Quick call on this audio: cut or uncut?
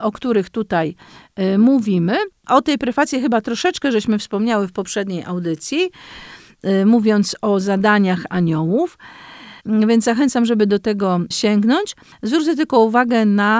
cut